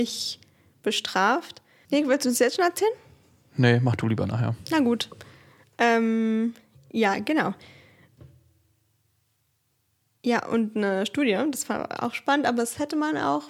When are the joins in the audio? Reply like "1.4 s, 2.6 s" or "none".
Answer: 1.9 s